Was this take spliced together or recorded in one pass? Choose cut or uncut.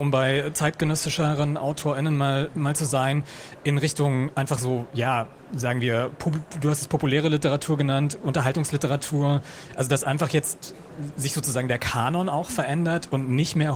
uncut